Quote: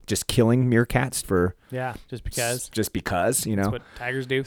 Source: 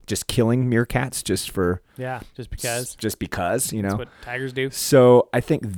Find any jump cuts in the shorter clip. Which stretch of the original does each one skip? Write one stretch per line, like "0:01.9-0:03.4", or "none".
0:01.2-0:01.5